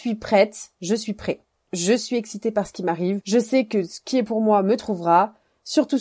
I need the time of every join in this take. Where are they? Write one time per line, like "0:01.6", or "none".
none